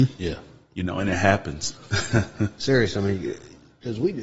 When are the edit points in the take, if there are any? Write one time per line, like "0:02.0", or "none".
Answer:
0:01.8